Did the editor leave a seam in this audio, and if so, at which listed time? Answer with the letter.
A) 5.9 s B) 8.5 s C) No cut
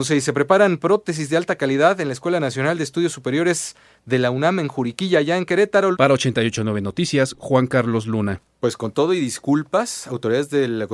A